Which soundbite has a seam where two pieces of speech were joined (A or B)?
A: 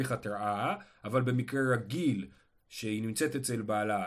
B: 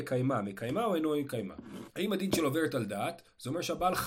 B